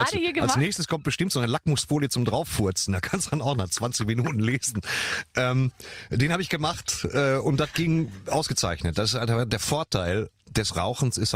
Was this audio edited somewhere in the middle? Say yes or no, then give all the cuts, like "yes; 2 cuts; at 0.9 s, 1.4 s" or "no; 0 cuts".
no; 0 cuts